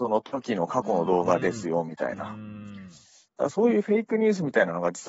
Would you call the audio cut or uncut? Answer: uncut